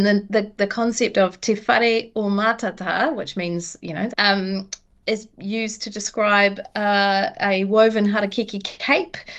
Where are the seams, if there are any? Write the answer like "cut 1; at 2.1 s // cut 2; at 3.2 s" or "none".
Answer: cut 1; at 4.1 s